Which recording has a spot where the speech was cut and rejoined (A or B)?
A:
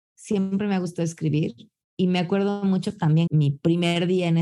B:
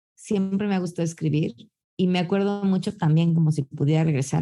A